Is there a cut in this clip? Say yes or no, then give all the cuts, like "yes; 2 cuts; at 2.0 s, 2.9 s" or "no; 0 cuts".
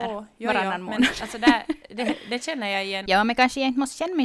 yes; 1 cut; at 3.1 s